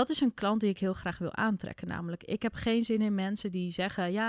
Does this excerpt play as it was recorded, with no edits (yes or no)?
yes